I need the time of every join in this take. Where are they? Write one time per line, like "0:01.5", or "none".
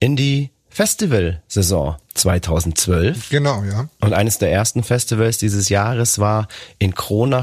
none